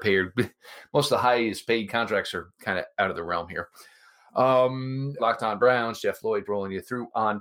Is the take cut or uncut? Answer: cut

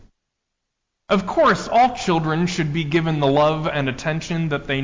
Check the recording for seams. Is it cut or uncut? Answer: uncut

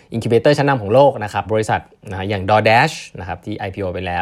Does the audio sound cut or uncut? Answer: cut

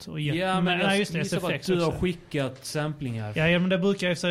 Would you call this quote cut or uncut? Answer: uncut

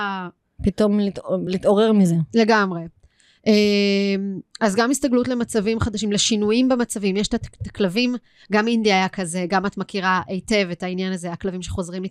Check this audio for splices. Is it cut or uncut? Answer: uncut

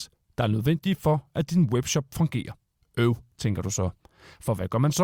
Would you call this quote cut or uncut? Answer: uncut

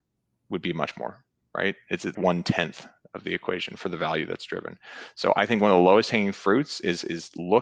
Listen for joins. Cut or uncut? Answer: cut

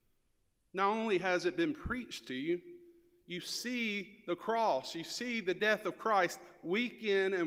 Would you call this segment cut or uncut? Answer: uncut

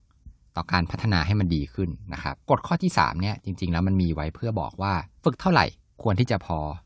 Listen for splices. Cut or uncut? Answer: cut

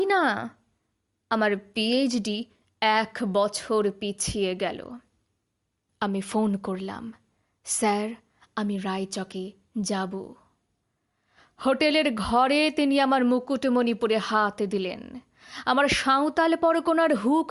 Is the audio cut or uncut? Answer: uncut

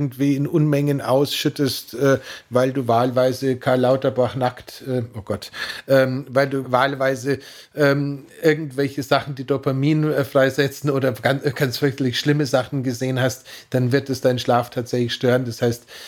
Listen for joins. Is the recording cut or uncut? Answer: uncut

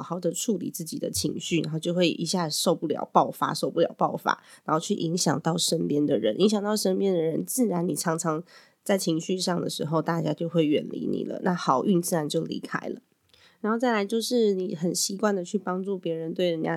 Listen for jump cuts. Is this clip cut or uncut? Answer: uncut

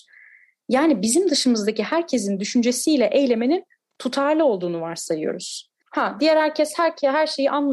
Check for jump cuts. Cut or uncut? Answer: cut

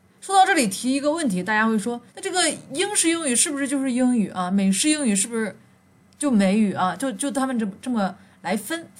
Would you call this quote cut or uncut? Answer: cut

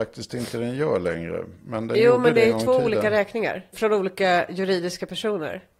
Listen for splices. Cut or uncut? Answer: cut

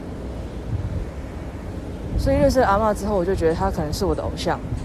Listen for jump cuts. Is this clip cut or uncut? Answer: uncut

